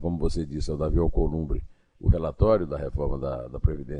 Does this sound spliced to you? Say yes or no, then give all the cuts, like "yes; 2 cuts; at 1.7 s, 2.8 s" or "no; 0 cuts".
no; 0 cuts